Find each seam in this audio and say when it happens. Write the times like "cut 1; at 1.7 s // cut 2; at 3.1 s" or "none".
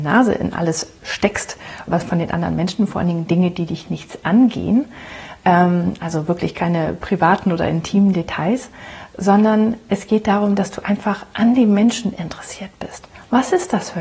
cut 1; at 1.9 s